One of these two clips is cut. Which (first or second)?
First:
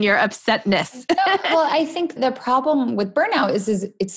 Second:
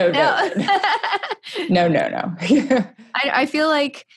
first